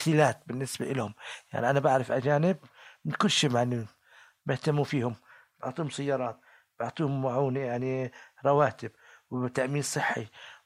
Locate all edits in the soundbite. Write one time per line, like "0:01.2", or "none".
none